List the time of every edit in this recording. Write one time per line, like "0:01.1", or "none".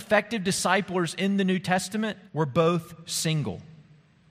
0:02.3